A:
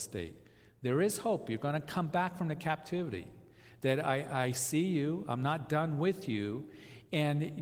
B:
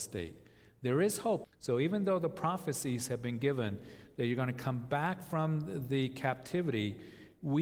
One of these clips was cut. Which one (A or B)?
B